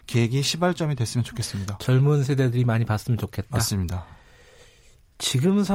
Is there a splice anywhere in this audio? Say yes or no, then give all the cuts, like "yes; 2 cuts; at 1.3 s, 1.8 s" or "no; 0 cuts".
no; 0 cuts